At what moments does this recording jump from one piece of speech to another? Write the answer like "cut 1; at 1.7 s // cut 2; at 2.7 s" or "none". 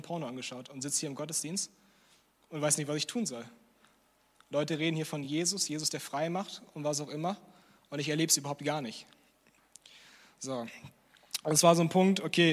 none